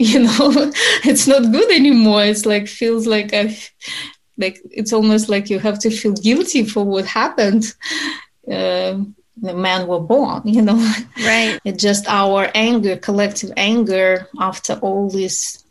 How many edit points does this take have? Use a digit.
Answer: 2